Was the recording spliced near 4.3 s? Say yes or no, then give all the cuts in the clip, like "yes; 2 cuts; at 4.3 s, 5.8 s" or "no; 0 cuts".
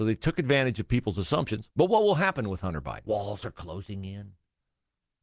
no; 2 cuts; at 1.7 s, 3.1 s